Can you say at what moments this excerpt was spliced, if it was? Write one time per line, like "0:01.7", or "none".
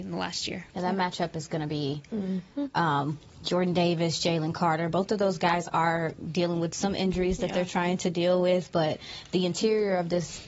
none